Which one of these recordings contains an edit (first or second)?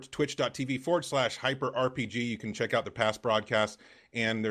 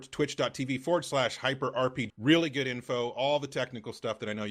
second